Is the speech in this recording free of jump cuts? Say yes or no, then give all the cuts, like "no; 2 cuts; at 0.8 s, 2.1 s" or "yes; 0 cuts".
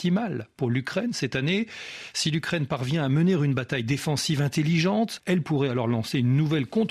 no; 1 cut; at 5.2 s